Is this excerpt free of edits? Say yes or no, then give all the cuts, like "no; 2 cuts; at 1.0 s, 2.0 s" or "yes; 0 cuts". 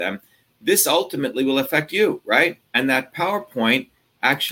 no; 1 cut; at 2.7 s